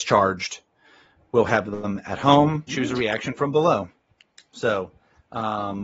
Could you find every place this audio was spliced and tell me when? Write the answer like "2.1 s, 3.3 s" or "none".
2.7 s